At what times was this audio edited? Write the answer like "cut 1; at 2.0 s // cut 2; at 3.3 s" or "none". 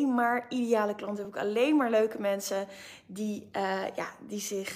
none